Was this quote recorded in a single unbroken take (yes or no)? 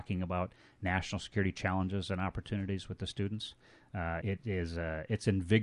no